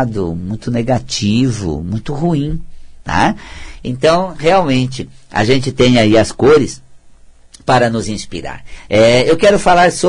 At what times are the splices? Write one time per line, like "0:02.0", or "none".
0:03.0